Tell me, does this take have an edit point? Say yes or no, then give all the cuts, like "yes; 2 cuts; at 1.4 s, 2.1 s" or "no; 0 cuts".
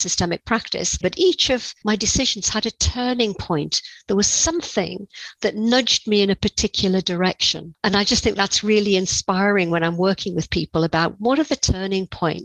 yes; 1 cut; at 1.0 s